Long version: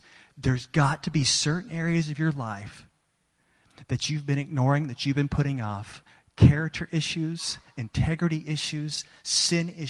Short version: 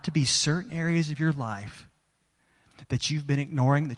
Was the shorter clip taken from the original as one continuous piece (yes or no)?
yes